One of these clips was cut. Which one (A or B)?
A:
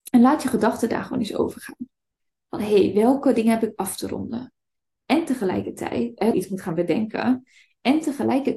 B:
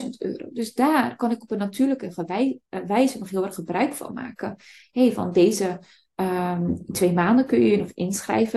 A